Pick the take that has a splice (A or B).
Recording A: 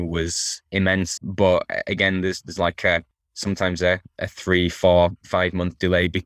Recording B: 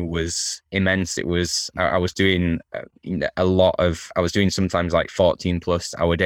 A